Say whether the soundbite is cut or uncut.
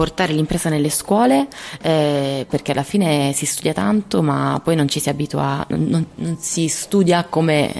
cut